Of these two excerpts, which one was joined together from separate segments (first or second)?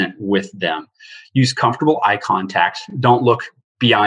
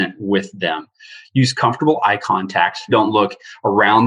second